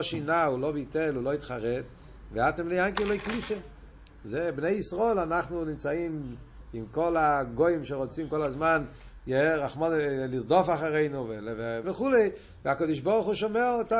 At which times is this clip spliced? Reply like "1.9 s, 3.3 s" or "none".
11.8 s